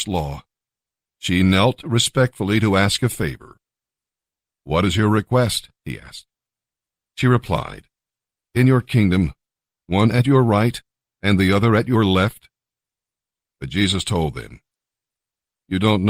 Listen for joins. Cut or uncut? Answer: cut